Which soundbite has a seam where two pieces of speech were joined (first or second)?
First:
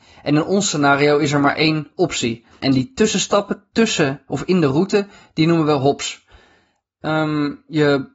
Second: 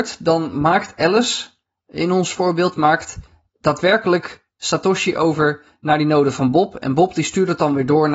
first